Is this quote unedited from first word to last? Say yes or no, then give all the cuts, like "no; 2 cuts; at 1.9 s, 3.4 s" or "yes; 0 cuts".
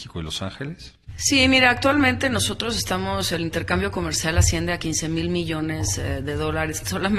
yes; 0 cuts